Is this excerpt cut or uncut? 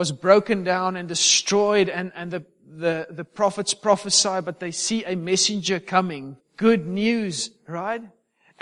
cut